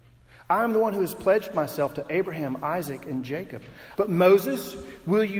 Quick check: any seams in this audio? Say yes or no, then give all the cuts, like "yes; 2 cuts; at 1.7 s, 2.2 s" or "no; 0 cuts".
yes; 1 cut; at 4.0 s